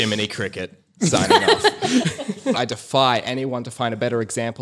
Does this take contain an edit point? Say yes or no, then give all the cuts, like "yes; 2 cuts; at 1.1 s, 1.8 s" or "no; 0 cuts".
yes; 1 cut; at 2.5 s